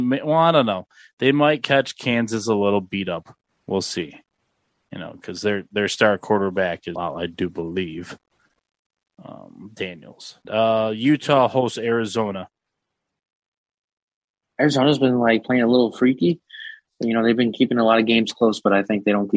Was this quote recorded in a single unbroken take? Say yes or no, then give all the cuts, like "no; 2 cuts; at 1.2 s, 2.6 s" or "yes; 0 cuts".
no; 2 cuts; at 7.0 s, 10.4 s